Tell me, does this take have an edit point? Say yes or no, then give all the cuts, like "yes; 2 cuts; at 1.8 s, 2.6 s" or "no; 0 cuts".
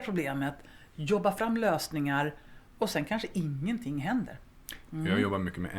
yes; 1 cut; at 4.9 s